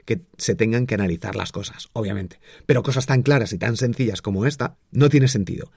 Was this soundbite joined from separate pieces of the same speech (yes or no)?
yes